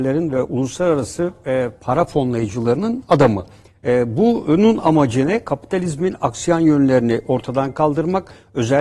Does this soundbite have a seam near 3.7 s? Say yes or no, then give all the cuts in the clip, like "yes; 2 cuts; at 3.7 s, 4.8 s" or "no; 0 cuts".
yes; 1 cut; at 3.7 s